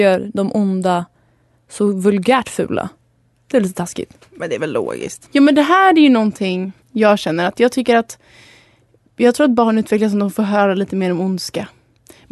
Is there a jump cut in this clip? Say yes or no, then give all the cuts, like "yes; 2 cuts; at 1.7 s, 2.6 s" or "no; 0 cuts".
yes; 2 cuts; at 5.3 s, 6.8 s